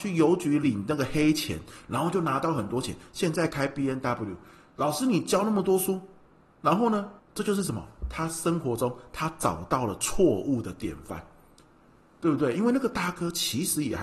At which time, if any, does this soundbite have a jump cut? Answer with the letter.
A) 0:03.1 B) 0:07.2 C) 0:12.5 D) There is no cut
B